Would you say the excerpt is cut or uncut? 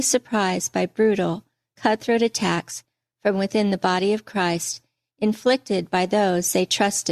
uncut